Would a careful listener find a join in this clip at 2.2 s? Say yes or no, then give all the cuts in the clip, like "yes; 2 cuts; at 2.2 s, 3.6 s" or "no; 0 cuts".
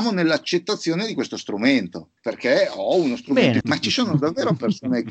yes; 2 cuts; at 2.2 s, 3.6 s